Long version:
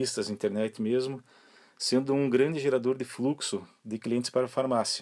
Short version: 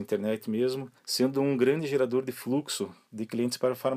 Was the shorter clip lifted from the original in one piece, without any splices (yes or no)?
no